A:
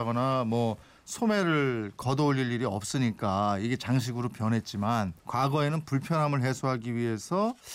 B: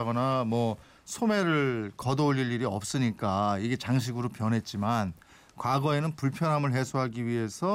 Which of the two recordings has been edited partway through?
A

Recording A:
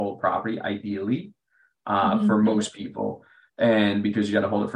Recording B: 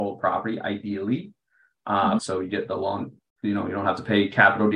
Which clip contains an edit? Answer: B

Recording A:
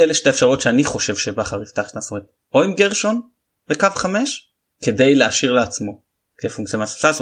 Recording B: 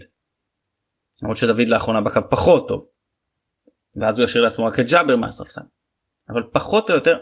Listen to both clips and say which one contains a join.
A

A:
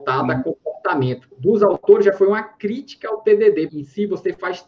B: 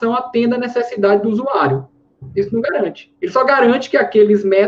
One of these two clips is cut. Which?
A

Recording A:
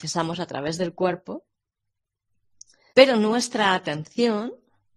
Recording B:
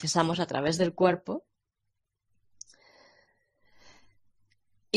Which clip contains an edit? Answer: A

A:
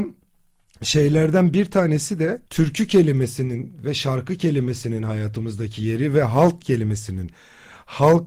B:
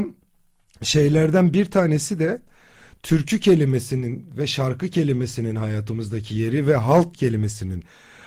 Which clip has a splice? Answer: A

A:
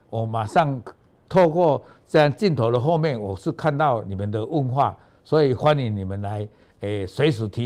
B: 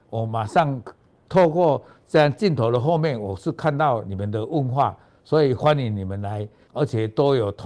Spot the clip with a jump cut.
B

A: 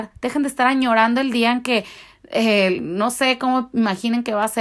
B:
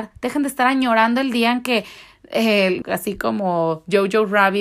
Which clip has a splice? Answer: B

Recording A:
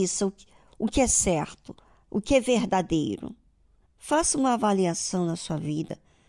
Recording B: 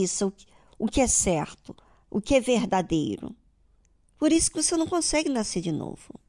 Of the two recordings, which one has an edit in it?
A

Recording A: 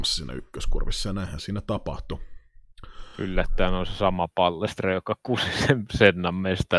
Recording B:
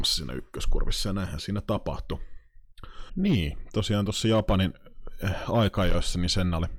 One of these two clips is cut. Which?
B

